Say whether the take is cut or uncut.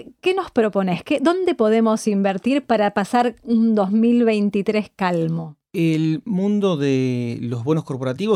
uncut